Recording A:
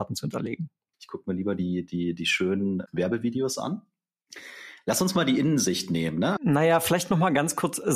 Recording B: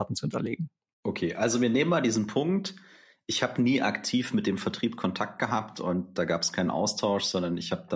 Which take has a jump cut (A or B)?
A